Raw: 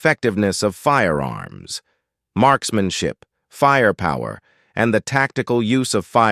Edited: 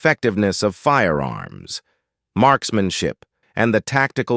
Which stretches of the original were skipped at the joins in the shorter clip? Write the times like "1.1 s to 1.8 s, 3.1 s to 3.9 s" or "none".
3.4 s to 4.6 s